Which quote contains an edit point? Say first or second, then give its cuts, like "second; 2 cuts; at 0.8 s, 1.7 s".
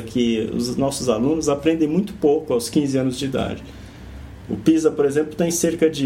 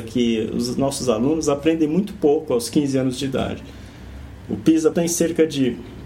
second; 1 cut; at 4.9 s